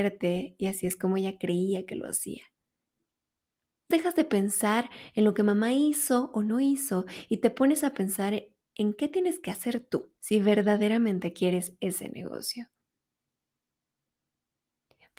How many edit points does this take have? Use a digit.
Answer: 2